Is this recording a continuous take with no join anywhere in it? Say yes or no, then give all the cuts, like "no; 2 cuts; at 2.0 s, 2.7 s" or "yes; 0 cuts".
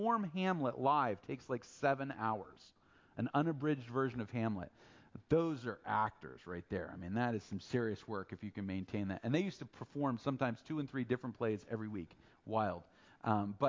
yes; 0 cuts